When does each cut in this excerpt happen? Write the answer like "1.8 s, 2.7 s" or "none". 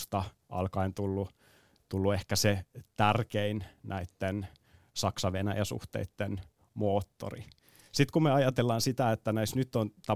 none